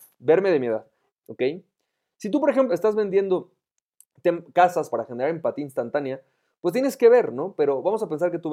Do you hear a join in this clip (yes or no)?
yes